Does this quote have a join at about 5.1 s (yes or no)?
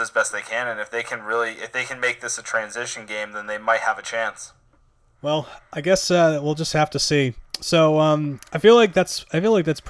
no